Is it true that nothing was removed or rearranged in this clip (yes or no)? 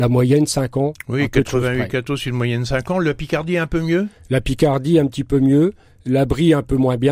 yes